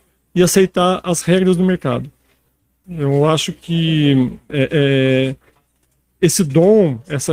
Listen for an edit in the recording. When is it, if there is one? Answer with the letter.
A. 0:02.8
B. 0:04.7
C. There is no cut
A